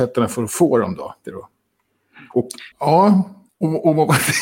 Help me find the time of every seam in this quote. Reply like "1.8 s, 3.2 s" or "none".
1.2 s, 2.7 s